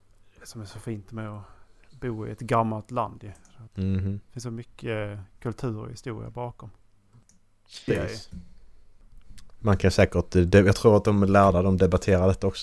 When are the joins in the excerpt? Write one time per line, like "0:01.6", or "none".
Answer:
0:03.7
0:07.9